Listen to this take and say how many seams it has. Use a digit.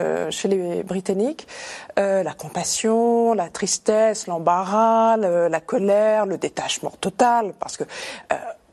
0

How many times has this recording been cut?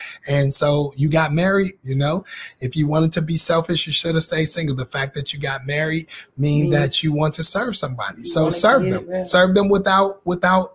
1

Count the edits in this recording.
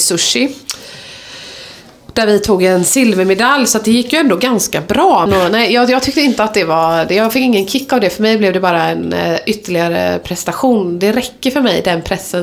1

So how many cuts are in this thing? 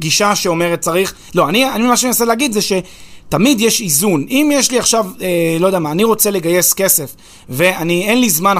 0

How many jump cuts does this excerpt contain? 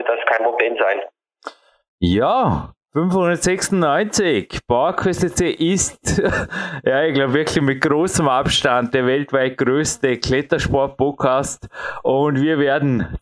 1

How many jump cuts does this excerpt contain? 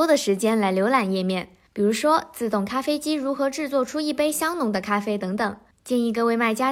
1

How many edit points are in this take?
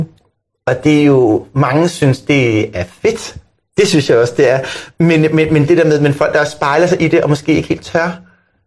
0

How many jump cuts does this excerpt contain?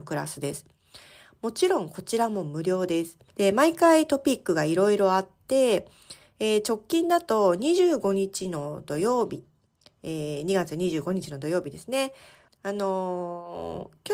2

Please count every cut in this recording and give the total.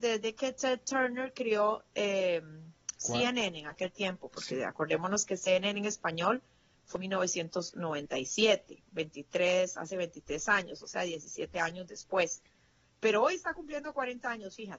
1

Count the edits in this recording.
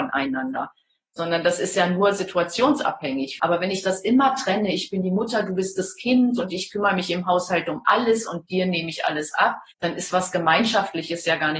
2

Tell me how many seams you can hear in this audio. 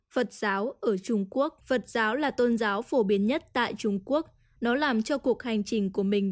1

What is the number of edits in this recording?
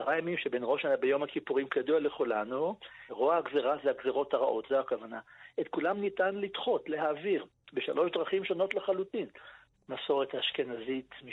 2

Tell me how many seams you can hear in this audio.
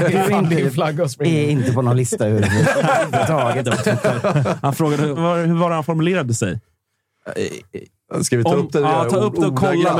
2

